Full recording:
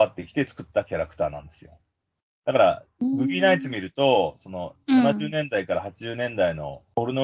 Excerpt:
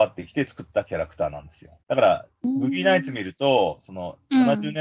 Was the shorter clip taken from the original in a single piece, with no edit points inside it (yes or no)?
no